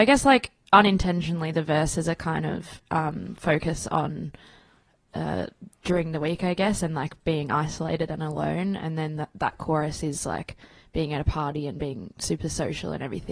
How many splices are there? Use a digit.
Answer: 0